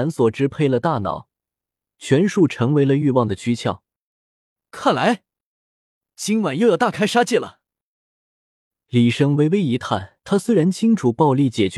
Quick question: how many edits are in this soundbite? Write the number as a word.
one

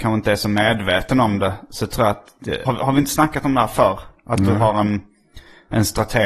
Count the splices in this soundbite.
one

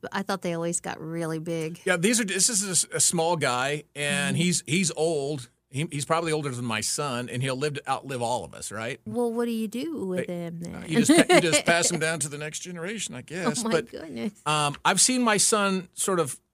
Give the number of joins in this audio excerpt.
one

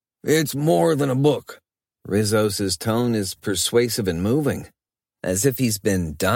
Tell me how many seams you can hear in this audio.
one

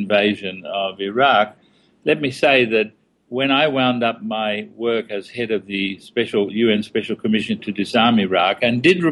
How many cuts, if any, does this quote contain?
zero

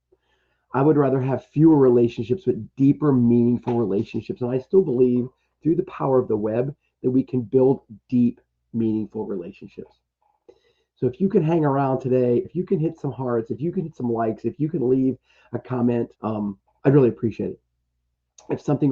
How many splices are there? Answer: two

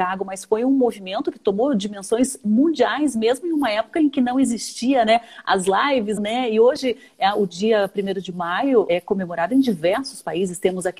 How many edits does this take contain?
two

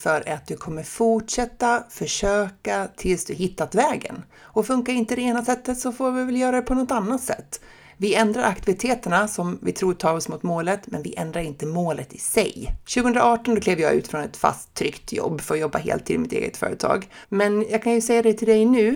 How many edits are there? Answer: two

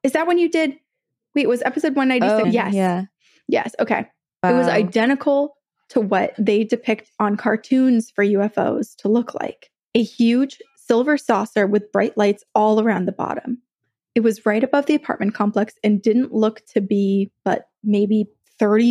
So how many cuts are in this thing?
one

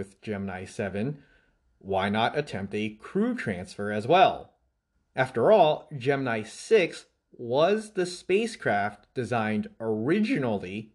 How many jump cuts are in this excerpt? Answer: one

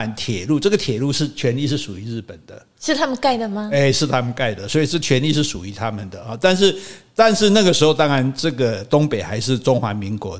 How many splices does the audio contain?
zero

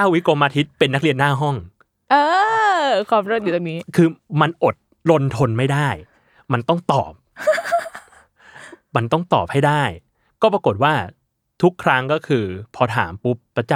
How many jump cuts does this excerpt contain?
zero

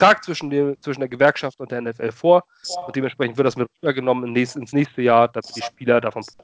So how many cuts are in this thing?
zero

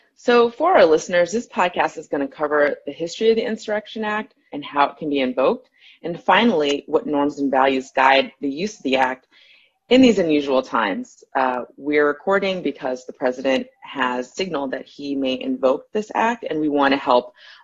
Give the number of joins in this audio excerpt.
one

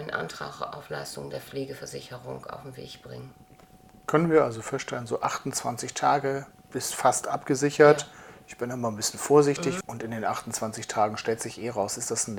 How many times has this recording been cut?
one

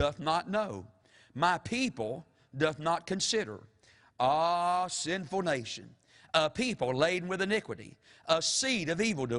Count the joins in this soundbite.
zero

